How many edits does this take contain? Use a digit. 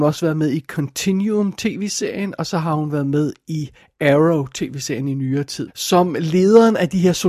1